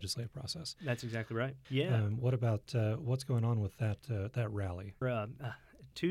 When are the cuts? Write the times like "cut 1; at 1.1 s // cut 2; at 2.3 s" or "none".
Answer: cut 1; at 1.6 s // cut 2; at 5.0 s